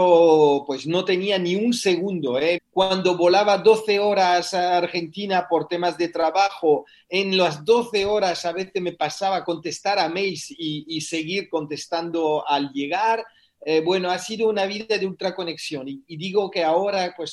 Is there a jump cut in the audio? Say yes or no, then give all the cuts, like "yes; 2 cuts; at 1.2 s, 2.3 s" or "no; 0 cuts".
yes; 1 cut; at 2.6 s